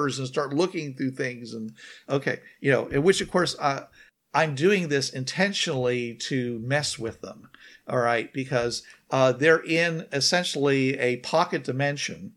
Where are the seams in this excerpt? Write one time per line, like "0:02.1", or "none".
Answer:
none